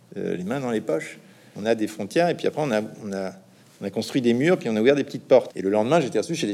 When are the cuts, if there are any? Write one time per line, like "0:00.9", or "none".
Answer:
0:01.5
0:05.5